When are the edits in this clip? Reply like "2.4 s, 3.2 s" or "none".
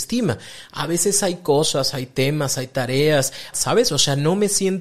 3.5 s

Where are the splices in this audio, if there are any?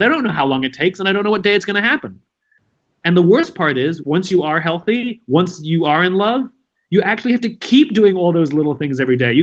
4.0 s

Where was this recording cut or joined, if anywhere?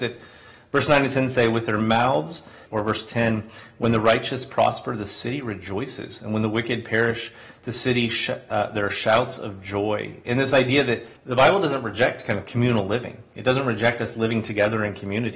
2.7 s, 11.2 s

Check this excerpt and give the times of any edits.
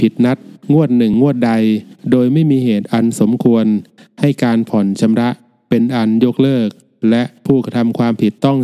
1.1 s

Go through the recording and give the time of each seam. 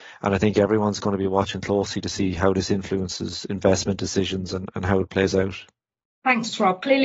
none

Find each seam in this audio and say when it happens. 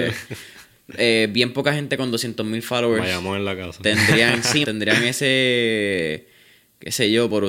4.6 s

